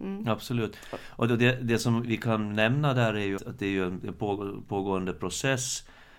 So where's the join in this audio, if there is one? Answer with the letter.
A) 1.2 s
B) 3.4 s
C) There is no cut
B